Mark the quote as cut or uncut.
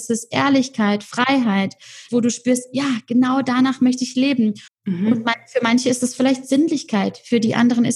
cut